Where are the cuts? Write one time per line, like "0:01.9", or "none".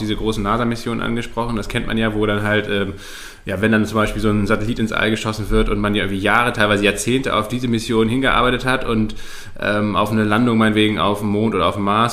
none